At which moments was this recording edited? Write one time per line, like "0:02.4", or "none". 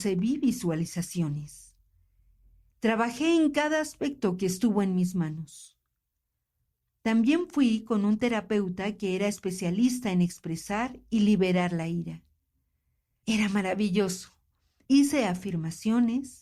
0:13.2
0:14.8